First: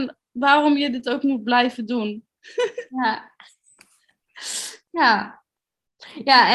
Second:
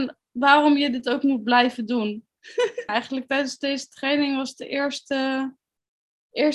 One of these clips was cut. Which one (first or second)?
second